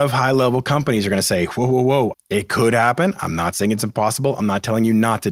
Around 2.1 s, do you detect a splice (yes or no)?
yes